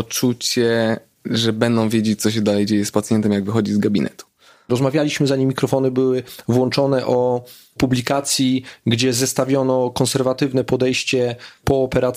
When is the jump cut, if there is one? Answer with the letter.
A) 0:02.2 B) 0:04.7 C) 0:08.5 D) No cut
B